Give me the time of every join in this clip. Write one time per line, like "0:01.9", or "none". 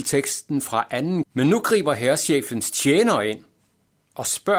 0:01.2